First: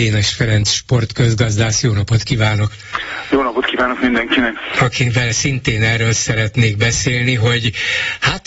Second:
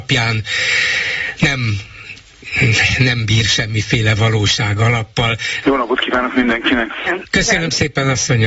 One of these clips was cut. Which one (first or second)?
second